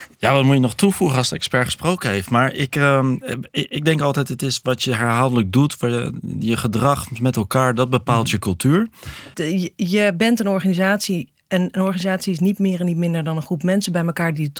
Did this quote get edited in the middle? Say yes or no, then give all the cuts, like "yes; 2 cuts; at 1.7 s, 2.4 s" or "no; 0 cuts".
yes; 1 cut; at 9.3 s